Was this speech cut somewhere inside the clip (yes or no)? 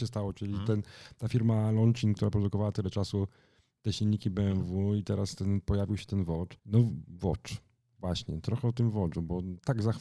yes